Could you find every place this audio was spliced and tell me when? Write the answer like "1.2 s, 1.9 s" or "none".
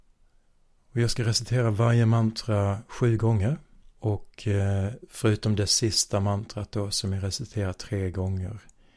3.9 s